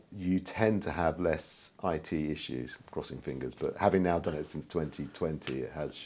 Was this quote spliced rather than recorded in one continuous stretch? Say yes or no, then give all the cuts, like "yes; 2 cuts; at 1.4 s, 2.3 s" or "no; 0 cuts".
no; 0 cuts